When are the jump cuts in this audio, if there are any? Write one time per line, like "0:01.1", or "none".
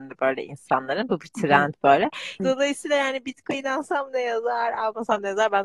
0:02.4